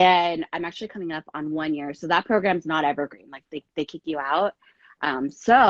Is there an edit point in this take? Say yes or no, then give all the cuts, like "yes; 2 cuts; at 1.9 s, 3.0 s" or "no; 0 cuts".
no; 0 cuts